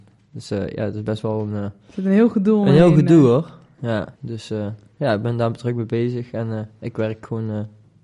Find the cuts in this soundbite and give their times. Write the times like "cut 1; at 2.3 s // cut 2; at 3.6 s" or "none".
cut 1; at 4.1 s